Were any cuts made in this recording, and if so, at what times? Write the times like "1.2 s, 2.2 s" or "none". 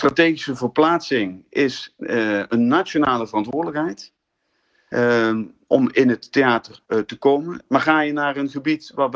7.7 s

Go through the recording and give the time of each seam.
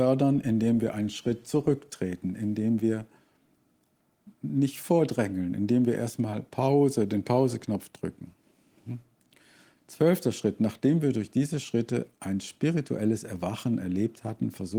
none

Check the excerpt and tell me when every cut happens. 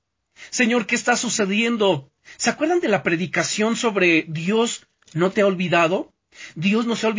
none

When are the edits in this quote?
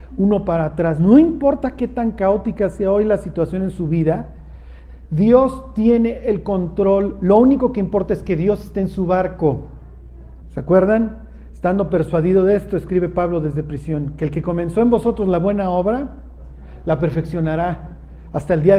10.4 s

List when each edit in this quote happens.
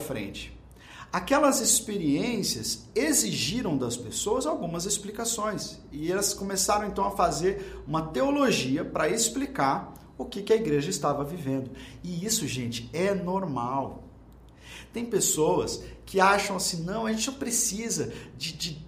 none

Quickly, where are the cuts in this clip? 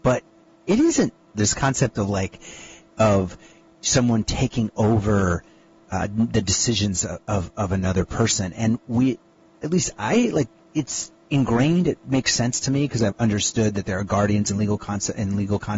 1.3 s, 13.1 s

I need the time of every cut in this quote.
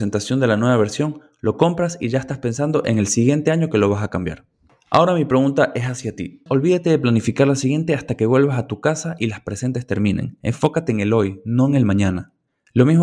6.5 s

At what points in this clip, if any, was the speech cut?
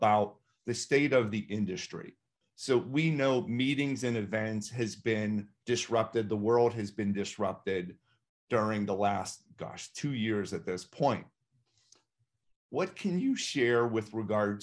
none

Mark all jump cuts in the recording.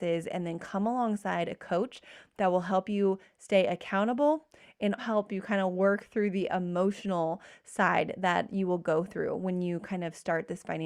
5.0 s

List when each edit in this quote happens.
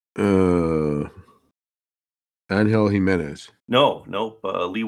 3.6 s

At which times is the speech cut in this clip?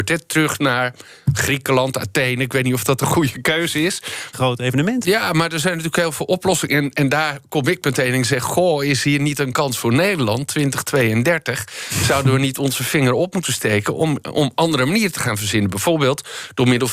4.3 s

